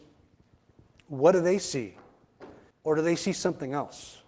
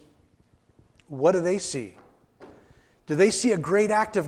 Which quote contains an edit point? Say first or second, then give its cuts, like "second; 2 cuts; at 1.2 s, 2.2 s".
first; 1 cut; at 2.7 s